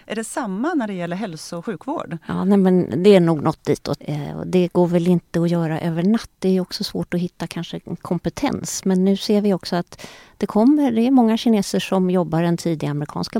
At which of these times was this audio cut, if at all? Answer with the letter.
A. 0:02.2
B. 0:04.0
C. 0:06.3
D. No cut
B